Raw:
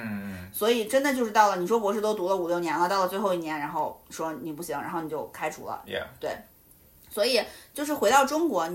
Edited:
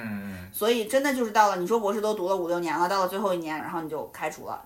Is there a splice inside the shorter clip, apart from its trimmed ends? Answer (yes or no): yes